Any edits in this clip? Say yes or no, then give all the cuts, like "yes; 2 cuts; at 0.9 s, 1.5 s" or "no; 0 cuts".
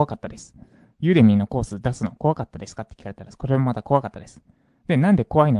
no; 0 cuts